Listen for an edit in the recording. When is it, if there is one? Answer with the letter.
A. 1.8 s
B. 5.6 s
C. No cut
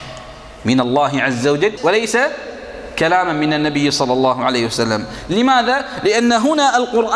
A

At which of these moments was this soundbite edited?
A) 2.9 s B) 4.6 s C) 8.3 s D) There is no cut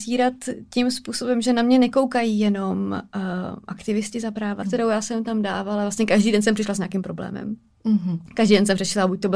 B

